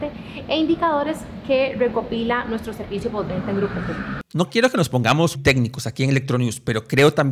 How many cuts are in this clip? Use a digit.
1